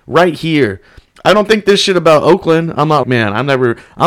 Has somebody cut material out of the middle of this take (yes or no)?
yes